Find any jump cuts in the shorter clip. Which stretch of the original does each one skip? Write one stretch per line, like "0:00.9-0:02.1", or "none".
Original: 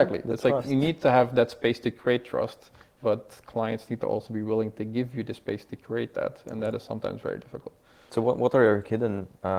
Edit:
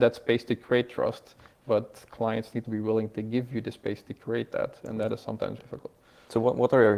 0:04.0-0:04.3
0:07.2-0:07.4